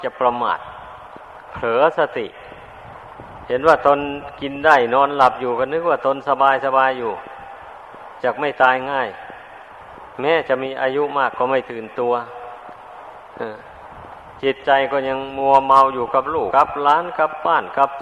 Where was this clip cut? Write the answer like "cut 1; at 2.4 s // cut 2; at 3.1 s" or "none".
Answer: cut 1; at 16.5 s